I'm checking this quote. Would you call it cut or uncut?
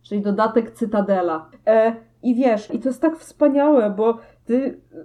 cut